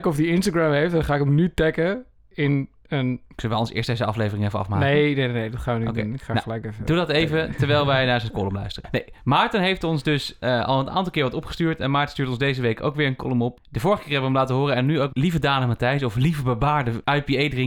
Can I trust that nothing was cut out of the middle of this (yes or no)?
no